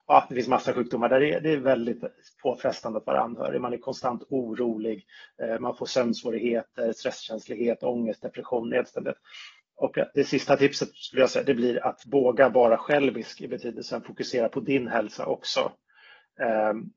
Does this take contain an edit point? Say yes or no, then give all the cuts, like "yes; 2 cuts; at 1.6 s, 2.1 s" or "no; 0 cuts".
no; 0 cuts